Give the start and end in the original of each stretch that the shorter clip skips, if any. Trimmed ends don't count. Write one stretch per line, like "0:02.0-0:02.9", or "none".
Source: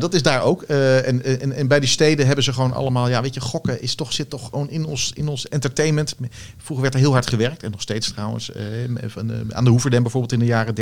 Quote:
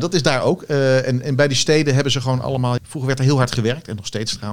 0:01.2-0:01.5
0:03.1-0:06.5